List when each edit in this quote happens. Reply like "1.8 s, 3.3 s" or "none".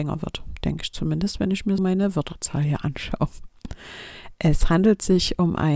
1.8 s